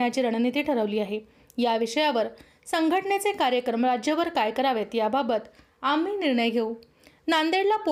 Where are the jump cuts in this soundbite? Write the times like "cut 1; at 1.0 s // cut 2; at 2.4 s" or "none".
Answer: none

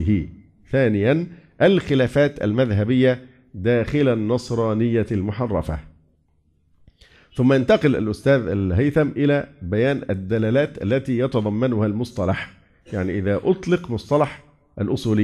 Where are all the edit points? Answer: none

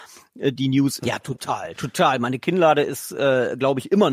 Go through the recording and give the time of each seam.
cut 1; at 1.0 s

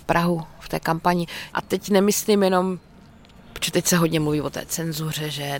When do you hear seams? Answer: cut 1; at 1.5 s

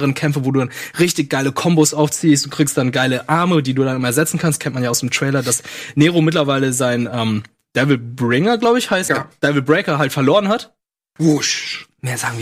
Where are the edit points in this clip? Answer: cut 1; at 9.1 s // cut 2; at 11.2 s

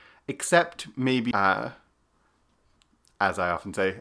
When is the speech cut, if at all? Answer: cut 1; at 1.3 s

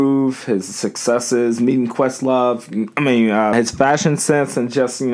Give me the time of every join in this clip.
cut 1; at 3.5 s

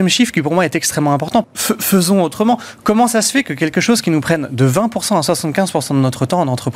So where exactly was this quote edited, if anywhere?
cut 1; at 1.4 s

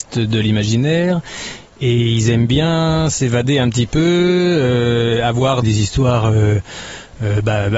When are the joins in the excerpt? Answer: cut 1; at 5.6 s

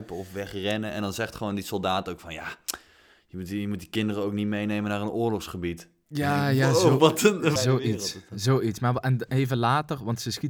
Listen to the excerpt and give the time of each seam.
cut 1; at 7.6 s

